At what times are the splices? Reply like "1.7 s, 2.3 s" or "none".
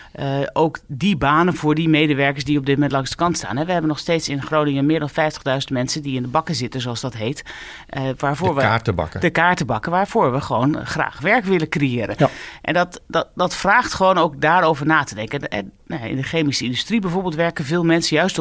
none